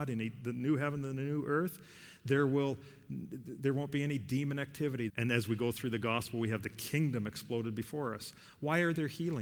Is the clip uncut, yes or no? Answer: no